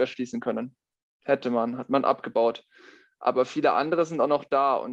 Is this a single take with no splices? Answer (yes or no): yes